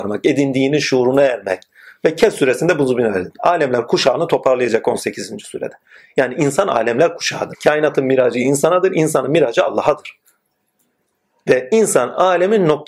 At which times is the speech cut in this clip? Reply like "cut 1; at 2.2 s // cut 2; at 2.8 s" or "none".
cut 1; at 7.5 s